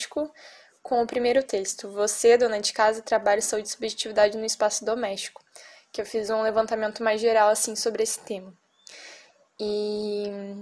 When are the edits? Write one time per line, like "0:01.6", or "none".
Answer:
none